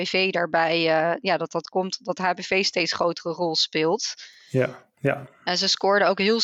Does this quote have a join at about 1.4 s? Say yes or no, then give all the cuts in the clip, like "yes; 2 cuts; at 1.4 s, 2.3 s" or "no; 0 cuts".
no; 1 cut; at 4.9 s